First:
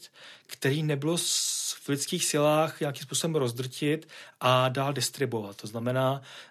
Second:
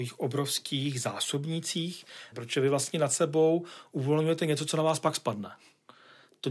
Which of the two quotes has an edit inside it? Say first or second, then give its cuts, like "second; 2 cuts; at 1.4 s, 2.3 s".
second; 1 cut; at 2.3 s